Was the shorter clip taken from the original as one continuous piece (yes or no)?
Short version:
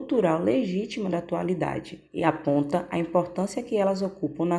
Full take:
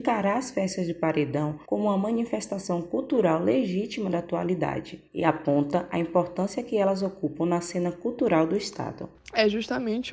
yes